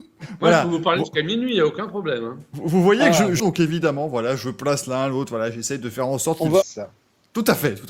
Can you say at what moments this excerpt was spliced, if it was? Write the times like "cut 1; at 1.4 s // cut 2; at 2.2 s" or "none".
cut 1; at 3.4 s // cut 2; at 6.6 s